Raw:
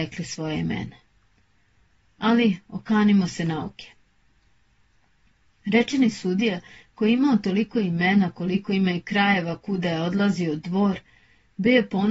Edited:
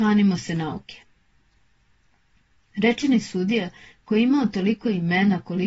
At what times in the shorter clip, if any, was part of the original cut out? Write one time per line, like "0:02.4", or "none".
none